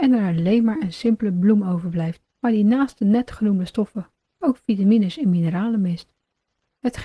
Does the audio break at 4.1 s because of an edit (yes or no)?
no